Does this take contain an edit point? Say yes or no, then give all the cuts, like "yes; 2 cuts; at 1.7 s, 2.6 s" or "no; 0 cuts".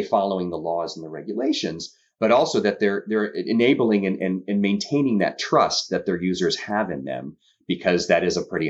no; 0 cuts